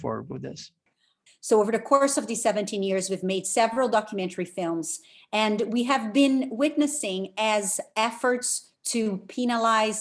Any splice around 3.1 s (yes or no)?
no